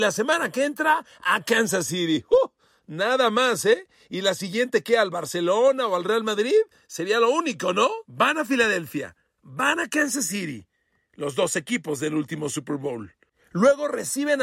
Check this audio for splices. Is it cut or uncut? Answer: cut